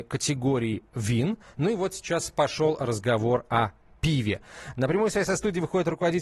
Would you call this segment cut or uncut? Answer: uncut